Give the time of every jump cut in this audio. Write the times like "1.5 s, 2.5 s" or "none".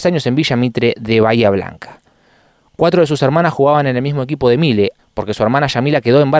5.0 s